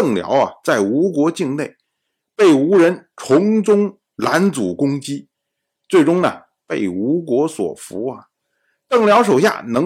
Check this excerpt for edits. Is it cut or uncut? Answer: uncut